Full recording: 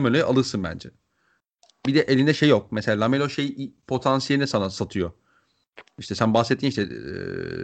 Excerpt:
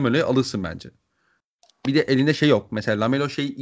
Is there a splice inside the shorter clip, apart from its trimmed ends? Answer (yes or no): no